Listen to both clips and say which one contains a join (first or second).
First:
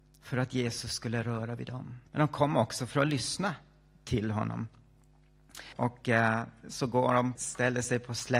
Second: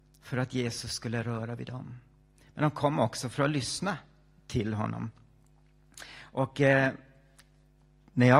first